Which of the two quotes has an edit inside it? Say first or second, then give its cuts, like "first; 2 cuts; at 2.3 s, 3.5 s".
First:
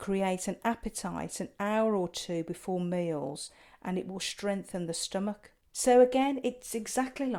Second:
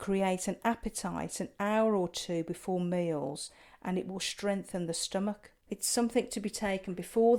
second; 1 cut; at 5.7 s